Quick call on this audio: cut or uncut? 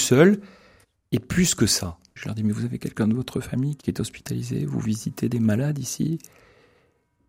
cut